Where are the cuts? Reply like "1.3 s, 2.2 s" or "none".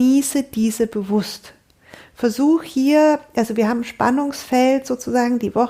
none

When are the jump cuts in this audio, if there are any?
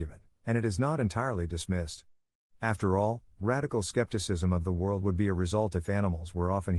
none

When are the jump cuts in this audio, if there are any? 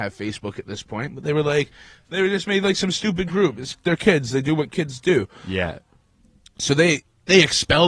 none

